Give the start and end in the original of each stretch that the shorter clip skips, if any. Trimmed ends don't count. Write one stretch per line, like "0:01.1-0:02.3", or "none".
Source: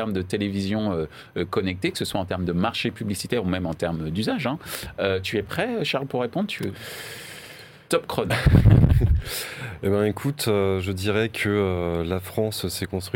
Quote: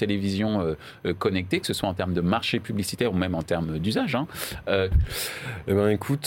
0:05.2-0:09.1

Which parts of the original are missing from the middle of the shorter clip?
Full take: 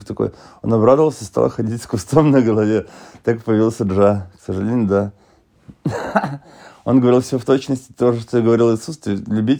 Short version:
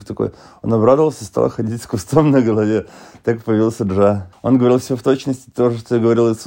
0:04.3-0:06.8

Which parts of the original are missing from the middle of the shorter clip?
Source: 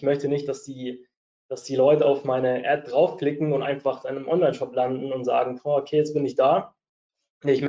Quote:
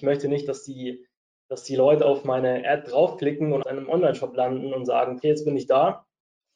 0:03.6-0:04.0
0:05.6-0:05.9

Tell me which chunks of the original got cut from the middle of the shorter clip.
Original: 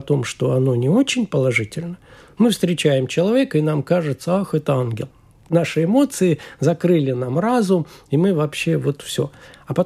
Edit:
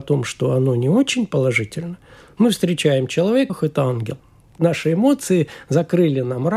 0:03.5-0:04.4

